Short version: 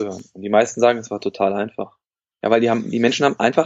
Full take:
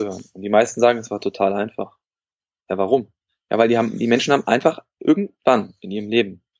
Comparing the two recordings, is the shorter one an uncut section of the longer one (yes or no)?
no